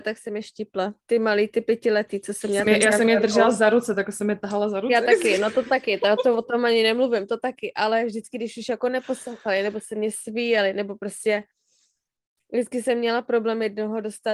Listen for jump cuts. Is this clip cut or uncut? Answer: uncut